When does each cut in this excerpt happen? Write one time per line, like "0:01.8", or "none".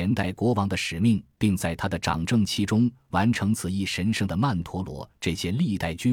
none